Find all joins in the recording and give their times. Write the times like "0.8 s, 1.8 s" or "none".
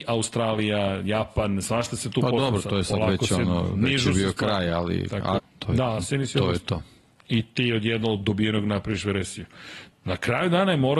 5.4 s, 9.9 s